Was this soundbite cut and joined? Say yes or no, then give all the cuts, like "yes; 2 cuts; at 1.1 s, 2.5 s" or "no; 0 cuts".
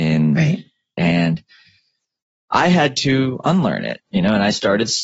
yes; 1 cut; at 1.0 s